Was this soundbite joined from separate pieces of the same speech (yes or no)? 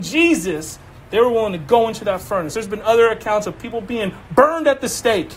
no